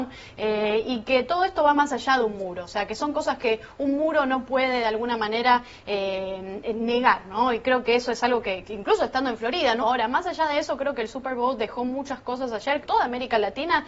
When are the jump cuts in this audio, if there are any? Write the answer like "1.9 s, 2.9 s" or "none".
8.6 s, 9.8 s, 12.8 s